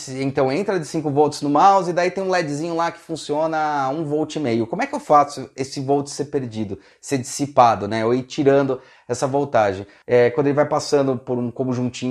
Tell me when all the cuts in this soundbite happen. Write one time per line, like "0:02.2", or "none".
none